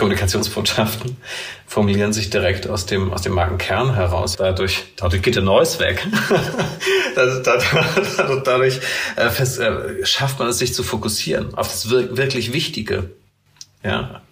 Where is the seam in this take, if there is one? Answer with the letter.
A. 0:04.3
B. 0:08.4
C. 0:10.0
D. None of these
A